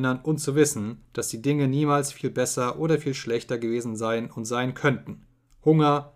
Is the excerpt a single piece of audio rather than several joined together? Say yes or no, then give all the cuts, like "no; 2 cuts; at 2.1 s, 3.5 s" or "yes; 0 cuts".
yes; 0 cuts